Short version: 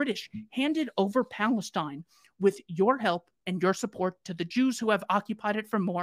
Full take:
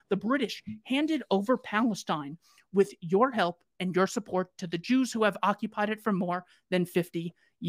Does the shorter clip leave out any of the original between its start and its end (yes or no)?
no